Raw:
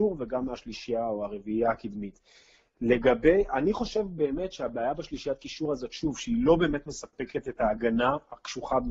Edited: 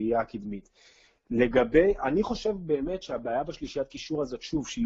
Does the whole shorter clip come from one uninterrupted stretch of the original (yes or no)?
yes